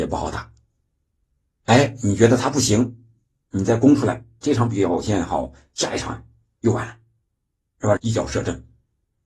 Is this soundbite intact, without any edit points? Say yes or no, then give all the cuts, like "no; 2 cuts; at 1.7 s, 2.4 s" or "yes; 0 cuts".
no; 2 cuts; at 4.4 s, 8.0 s